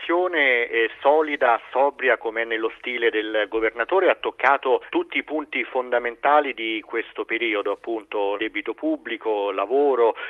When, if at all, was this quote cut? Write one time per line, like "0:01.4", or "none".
0:04.9
0:08.4